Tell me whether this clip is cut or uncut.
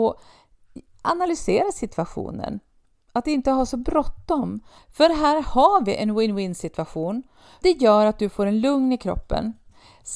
cut